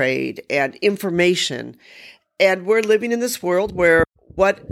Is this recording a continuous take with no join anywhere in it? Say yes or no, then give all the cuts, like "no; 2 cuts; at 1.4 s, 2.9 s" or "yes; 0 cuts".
yes; 0 cuts